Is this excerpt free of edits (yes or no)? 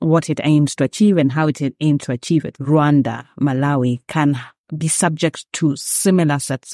no